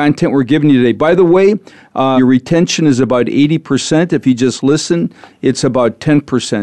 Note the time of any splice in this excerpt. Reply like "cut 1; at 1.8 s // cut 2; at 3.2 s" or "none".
cut 1; at 2.2 s

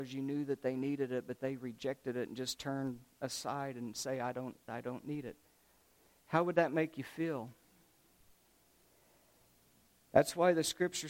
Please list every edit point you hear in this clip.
cut 1; at 4.7 s

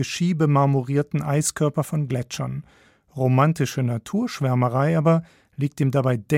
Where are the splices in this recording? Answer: none

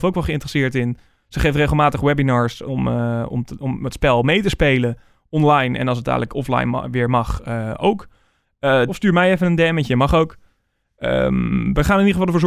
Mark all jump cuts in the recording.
cut 1; at 8.9 s

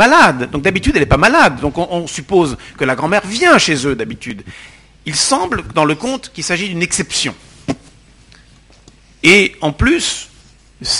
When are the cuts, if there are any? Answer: none

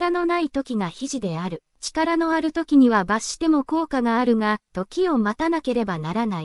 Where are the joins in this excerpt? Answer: cut 1; at 1.7 s // cut 2; at 4.7 s

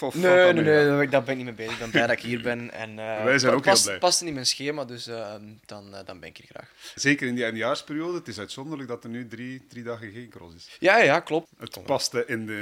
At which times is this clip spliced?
cut 1; at 7.0 s // cut 2; at 11.4 s

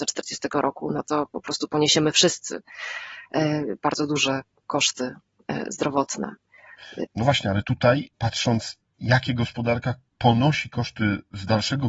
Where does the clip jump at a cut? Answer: cut 1; at 7.0 s // cut 2; at 8.1 s

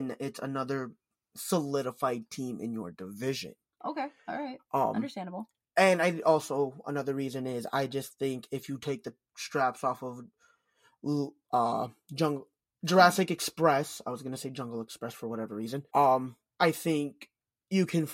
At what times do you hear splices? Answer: cut 1; at 15.9 s

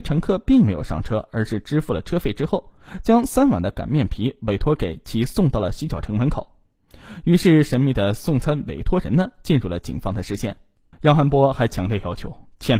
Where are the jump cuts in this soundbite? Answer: cut 1; at 10.9 s

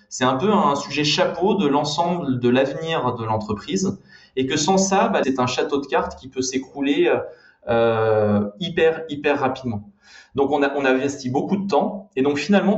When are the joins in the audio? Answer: cut 1; at 5.2 s

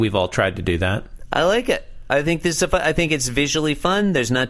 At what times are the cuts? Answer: none

